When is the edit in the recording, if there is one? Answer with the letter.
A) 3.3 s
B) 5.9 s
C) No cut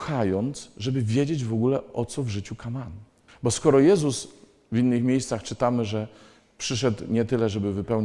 A